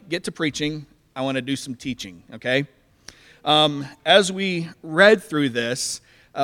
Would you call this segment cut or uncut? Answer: uncut